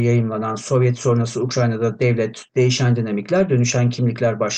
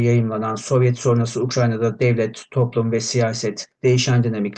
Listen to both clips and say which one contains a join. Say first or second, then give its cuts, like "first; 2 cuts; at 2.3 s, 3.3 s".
first; 1 cut; at 2.5 s